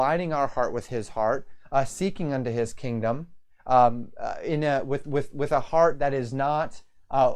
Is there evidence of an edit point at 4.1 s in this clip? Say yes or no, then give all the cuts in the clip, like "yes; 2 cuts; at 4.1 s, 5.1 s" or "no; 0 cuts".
no; 0 cuts